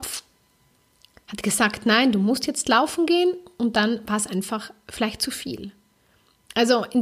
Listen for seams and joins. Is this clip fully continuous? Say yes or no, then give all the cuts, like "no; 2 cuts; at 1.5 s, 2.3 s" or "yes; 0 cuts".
yes; 0 cuts